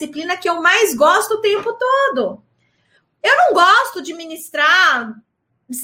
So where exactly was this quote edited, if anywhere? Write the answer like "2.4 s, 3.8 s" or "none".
none